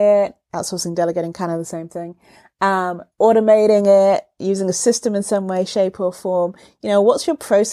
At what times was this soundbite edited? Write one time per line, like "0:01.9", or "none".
0:03.1